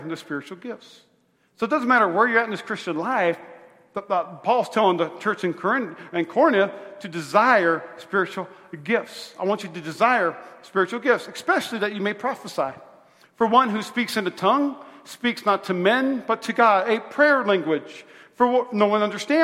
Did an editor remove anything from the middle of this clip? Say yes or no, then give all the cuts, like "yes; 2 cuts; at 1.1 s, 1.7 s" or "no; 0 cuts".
no; 0 cuts